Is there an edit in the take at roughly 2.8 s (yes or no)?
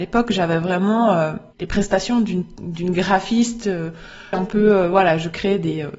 no